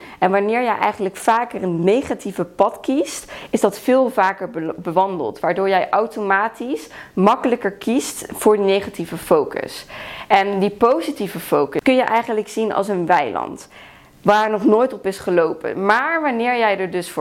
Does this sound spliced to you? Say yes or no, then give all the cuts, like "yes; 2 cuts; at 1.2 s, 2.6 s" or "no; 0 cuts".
yes; 1 cut; at 11.8 s